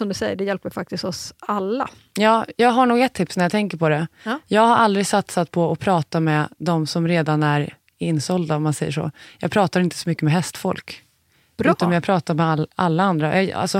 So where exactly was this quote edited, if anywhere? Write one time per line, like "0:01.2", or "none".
none